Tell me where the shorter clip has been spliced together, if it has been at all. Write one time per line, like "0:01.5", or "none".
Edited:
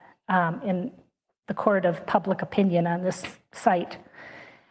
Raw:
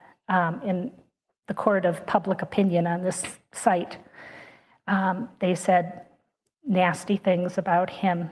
none